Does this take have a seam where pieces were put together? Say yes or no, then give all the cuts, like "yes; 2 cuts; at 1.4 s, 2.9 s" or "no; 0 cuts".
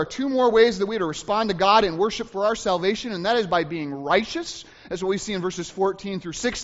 no; 0 cuts